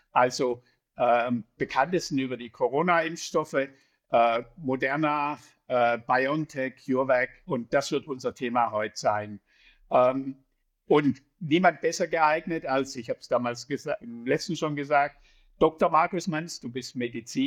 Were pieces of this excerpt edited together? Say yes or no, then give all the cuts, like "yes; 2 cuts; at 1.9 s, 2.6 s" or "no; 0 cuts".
no; 0 cuts